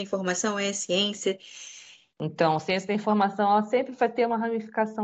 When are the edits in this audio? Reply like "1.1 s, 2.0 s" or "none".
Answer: 2.1 s